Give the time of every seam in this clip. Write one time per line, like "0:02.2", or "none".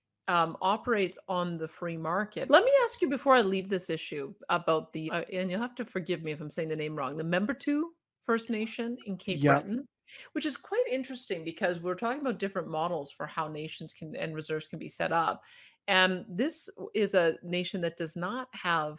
0:02.5
0:05.1